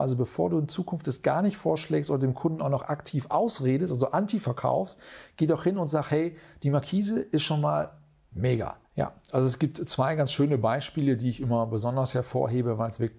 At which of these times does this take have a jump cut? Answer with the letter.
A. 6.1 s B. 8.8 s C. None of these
B